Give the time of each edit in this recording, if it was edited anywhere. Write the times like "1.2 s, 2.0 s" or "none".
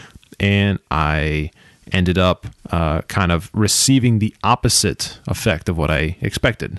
2.6 s